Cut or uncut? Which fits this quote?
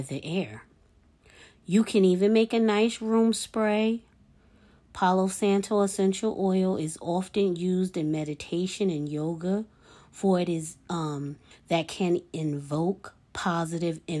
cut